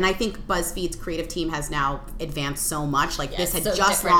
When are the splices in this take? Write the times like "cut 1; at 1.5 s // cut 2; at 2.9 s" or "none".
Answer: none